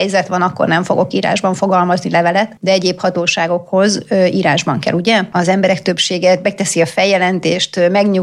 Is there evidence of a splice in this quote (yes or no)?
yes